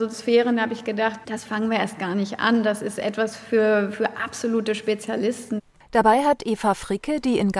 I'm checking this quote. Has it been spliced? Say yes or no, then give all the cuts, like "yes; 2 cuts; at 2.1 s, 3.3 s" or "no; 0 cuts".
no; 0 cuts